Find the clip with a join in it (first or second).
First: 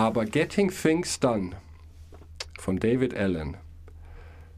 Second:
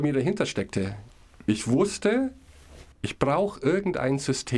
second